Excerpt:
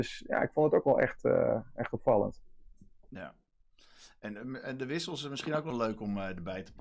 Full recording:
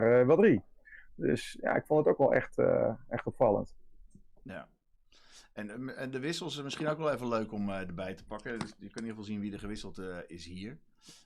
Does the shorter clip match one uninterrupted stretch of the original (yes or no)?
no